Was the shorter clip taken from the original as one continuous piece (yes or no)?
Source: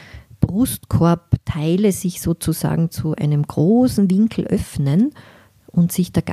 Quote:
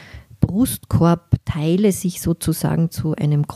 yes